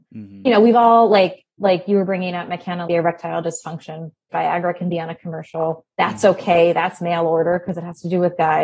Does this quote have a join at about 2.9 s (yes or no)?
yes